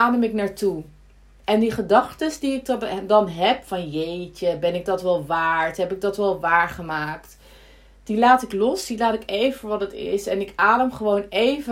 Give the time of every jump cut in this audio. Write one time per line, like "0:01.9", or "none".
none